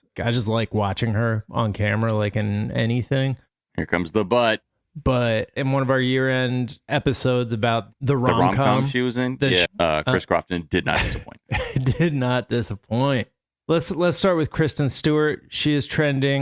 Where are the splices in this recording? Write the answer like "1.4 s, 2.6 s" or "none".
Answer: 5.6 s, 9.6 s

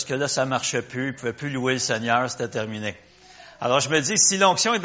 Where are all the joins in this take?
none

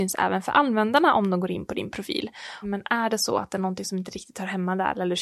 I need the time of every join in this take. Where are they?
2.6 s

